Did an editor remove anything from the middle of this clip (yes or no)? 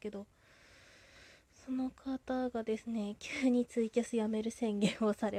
no